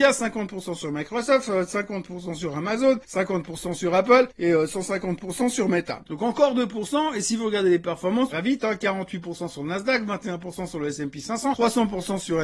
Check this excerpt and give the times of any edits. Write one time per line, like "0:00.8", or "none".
0:06.0
0:08.3